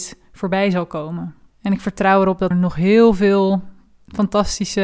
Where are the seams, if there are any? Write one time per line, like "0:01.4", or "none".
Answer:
0:01.5
0:02.5